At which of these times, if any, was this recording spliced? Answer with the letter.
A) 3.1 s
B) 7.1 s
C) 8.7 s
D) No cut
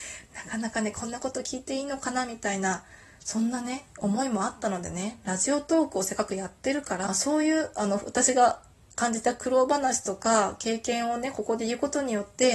B